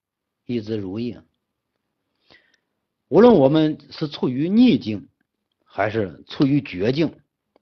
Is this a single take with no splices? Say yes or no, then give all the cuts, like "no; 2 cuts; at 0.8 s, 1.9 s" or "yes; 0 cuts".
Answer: yes; 0 cuts